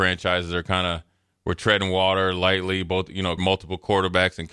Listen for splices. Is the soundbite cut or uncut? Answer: cut